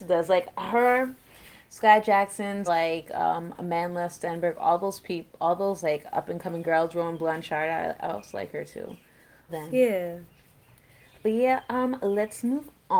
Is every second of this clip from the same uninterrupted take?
no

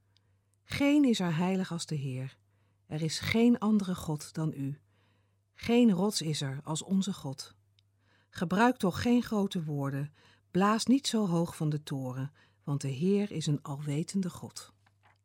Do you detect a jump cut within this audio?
no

